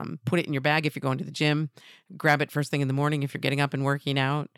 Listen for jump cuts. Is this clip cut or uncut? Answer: uncut